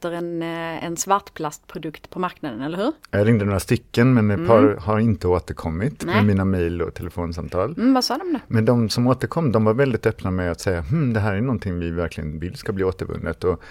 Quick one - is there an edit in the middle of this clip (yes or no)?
no